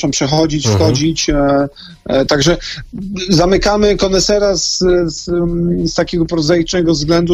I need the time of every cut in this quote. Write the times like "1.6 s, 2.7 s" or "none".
2.3 s